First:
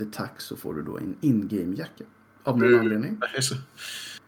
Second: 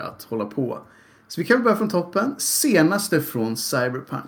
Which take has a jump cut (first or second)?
first